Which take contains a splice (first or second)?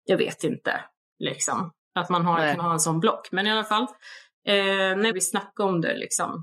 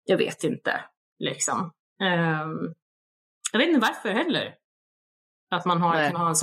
first